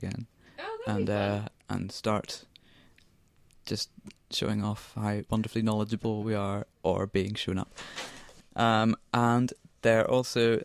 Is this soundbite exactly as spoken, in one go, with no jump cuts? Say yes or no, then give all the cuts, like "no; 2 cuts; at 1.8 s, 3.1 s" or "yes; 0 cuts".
yes; 0 cuts